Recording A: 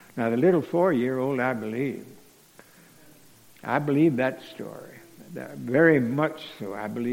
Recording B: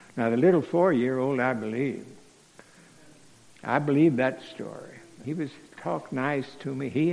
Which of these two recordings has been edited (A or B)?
B